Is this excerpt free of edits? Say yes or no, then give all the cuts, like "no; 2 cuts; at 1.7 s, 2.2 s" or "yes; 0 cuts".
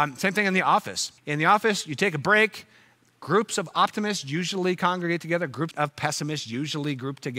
no; 2 cuts; at 1.2 s, 5.7 s